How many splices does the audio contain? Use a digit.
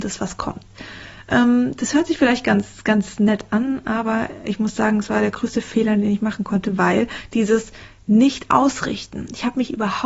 0